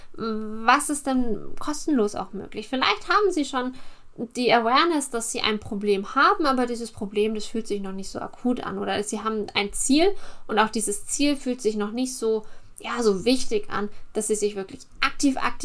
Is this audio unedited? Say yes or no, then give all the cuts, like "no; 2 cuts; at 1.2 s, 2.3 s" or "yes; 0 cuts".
yes; 0 cuts